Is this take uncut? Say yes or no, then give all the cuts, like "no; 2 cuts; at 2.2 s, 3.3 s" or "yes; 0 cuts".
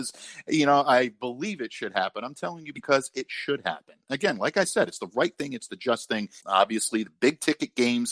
no; 1 cut; at 6.4 s